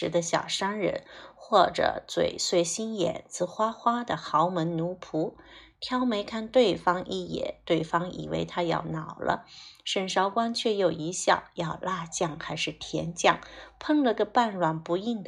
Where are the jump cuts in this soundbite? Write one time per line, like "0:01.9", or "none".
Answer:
none